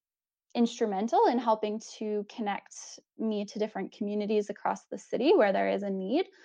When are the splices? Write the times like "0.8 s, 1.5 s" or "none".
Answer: none